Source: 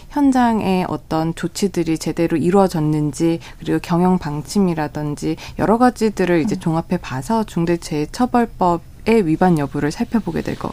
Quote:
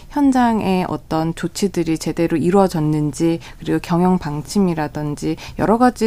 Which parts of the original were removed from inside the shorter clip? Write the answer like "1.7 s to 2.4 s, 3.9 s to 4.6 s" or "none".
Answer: none